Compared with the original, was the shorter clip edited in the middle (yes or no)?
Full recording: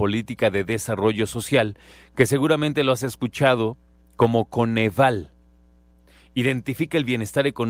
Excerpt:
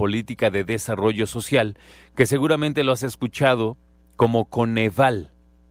no